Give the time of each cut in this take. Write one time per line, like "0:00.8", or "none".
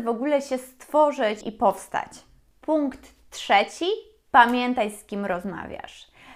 0:01.4